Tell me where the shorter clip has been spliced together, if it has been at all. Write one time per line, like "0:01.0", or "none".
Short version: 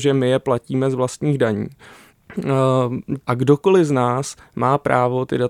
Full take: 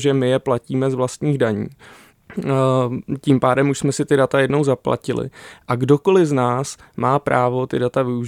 0:03.2